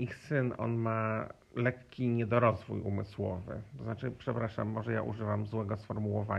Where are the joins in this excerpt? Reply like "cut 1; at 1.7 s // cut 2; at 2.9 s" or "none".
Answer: cut 1; at 1.4 s